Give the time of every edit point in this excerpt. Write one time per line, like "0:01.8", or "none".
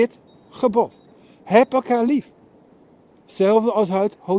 none